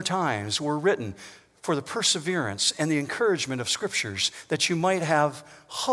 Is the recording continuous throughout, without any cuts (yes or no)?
yes